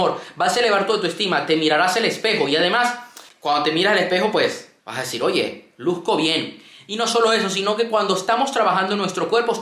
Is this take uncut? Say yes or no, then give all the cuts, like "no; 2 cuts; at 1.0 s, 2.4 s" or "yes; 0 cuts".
yes; 0 cuts